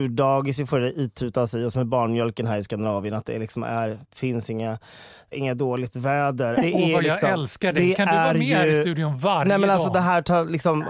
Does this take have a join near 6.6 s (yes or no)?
yes